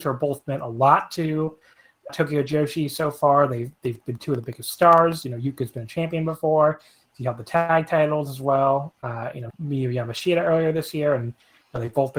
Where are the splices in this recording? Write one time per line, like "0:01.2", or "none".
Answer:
0:02.1
0:09.5